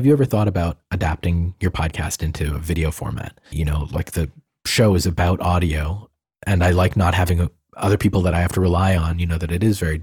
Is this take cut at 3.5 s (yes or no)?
yes